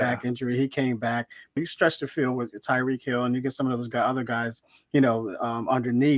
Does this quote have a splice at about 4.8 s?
no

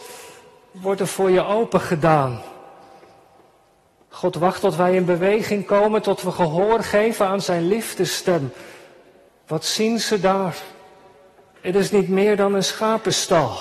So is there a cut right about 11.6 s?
yes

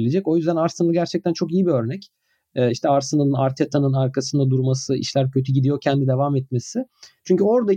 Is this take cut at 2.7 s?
no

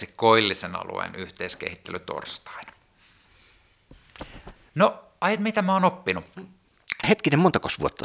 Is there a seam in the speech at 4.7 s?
yes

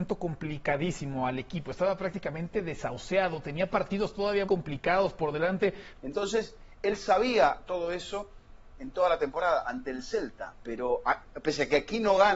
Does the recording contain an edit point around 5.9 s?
yes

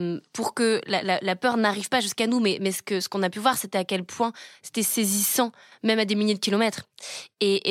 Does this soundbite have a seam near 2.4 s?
no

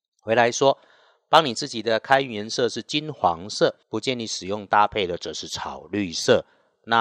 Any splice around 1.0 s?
no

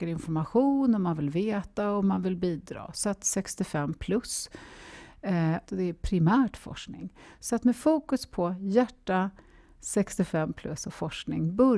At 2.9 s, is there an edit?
no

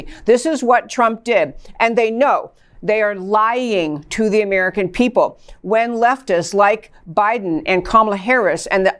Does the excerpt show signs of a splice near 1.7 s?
yes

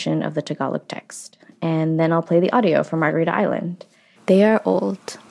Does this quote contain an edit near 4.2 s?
yes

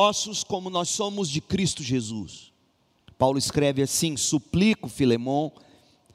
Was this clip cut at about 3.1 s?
yes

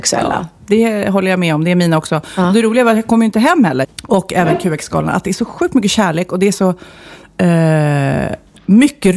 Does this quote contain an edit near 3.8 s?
yes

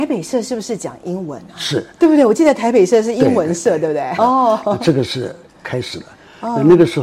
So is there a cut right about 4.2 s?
yes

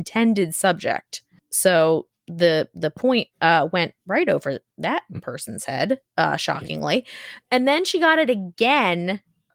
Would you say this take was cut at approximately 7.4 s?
no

